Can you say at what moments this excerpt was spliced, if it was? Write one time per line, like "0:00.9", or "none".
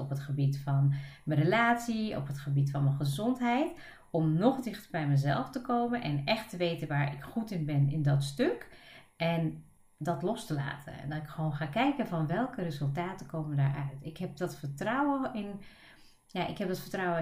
none